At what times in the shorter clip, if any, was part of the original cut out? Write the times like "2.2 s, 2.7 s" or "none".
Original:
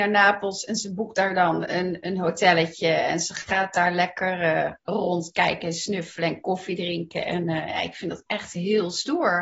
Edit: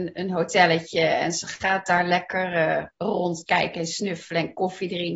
none